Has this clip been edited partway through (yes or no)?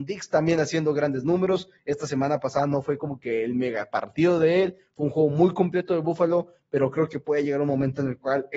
no